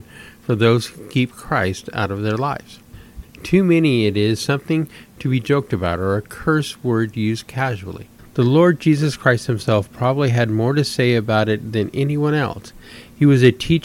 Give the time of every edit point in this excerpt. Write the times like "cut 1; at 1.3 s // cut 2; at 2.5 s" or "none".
cut 1; at 3.2 s // cut 2; at 8.2 s

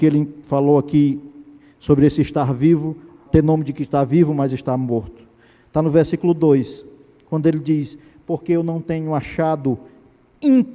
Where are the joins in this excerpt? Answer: cut 1; at 3.3 s

